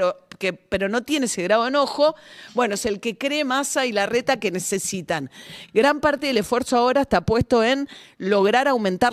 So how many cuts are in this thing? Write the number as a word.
zero